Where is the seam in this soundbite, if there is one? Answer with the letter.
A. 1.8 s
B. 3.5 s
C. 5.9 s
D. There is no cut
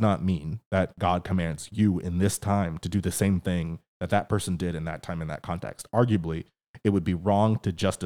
D